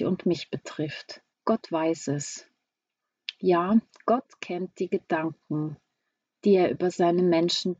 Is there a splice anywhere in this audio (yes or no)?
yes